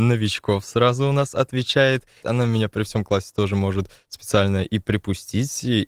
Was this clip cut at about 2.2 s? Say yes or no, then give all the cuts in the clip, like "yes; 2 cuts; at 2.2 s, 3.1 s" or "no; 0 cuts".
yes; 1 cut; at 2.2 s